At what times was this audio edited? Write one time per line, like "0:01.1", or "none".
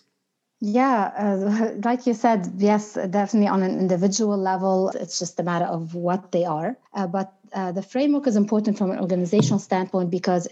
0:04.9
0:06.9